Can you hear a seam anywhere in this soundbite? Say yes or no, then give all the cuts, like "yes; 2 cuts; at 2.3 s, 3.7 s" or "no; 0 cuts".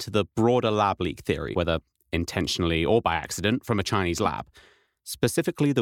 yes; 1 cut; at 1.5 s